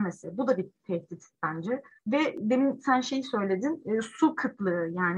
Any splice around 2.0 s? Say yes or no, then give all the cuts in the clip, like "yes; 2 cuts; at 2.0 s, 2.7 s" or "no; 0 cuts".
yes; 1 cut; at 2.0 s